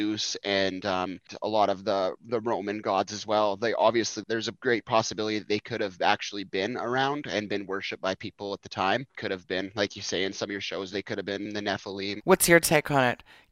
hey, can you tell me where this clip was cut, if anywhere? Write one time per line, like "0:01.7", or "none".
0:10.9
0:12.2